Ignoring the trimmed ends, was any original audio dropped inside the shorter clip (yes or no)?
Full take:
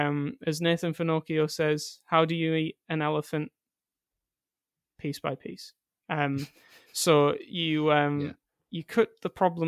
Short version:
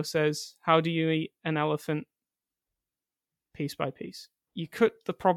yes